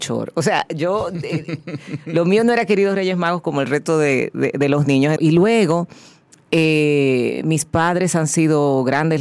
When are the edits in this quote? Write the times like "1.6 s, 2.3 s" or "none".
5.2 s